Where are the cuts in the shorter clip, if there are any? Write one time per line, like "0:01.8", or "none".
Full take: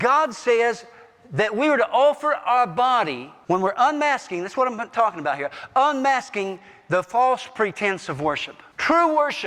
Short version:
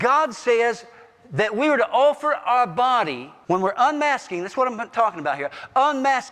none